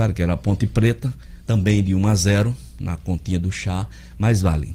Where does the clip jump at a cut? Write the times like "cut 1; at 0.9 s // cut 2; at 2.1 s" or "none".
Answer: none